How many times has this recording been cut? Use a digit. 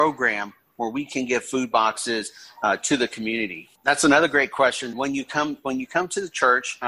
2